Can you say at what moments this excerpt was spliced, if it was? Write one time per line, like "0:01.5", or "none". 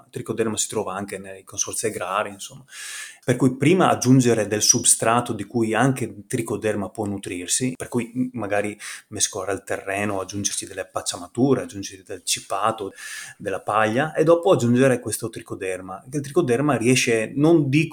none